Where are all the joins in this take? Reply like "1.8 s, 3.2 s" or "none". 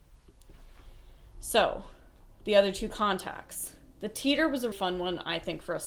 4.7 s